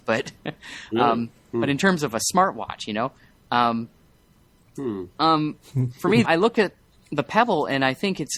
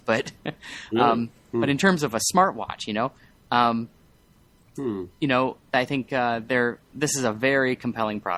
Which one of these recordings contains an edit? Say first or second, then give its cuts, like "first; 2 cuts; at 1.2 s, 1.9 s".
first; 2 cuts; at 5.1 s, 6.2 s